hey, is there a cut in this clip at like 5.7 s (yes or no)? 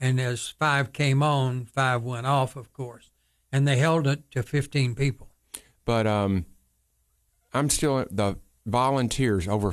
yes